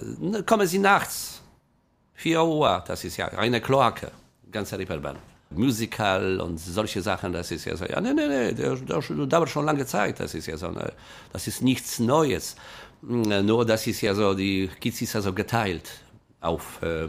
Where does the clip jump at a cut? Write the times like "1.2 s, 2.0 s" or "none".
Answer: 5.5 s